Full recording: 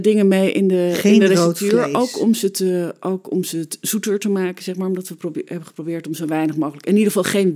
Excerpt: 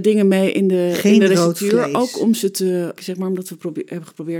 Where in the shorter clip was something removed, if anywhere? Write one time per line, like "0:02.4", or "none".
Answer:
0:03.0